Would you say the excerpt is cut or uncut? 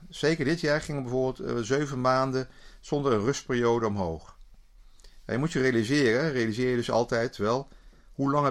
uncut